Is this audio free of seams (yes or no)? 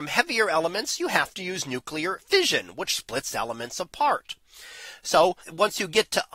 no